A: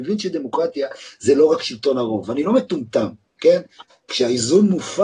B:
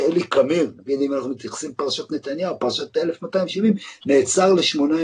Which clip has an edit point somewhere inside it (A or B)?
A